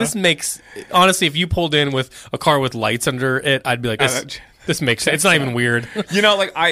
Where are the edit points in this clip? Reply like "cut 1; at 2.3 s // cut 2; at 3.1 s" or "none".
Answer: cut 1; at 4.0 s